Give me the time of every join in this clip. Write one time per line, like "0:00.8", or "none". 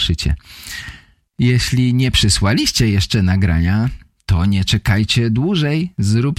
none